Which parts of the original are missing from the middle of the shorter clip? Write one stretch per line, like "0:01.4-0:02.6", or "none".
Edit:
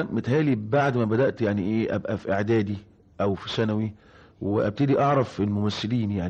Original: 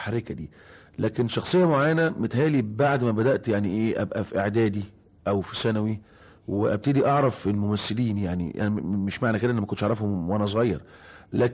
none